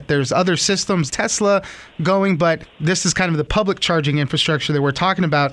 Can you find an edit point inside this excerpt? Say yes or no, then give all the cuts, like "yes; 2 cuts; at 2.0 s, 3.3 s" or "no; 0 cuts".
yes; 1 cut; at 1.1 s